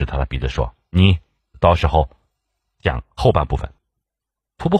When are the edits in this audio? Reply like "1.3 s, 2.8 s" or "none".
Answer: 3.8 s